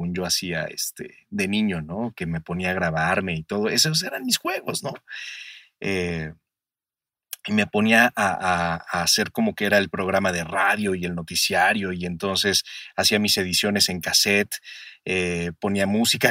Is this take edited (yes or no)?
no